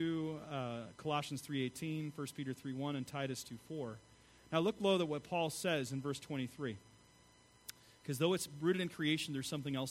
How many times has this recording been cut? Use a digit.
0